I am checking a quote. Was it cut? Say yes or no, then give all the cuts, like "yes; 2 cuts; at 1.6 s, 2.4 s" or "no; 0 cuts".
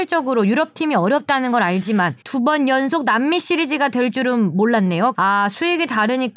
yes; 2 cuts; at 2.2 s, 5.1 s